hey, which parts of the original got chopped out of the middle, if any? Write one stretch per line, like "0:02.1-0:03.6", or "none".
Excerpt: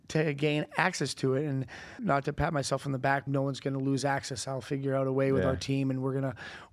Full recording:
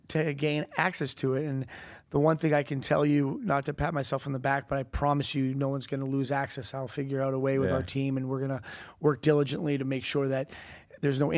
0:02.0-0:03.4
0:04.7-0:05.5